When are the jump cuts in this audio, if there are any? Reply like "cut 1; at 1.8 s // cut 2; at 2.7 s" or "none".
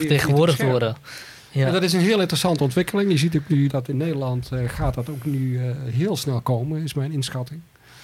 cut 1; at 3.7 s